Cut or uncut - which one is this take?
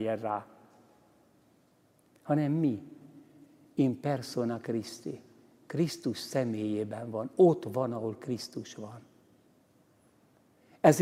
uncut